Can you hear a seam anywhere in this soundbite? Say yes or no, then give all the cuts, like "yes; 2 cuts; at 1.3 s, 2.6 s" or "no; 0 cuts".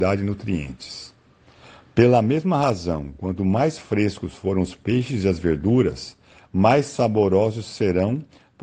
no; 0 cuts